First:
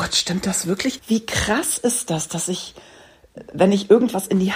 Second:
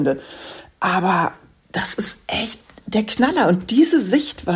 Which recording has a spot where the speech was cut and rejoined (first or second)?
first